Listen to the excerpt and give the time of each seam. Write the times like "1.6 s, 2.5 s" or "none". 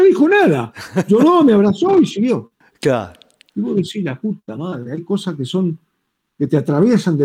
none